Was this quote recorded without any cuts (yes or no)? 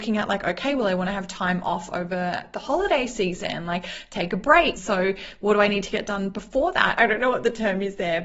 no